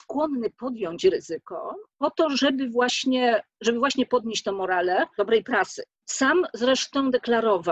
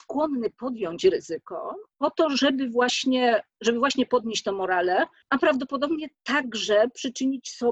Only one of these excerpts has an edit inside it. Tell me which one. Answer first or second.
first